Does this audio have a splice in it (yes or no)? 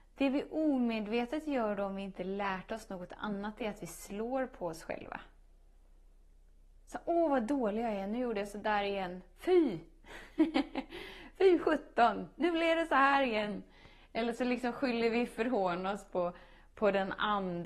no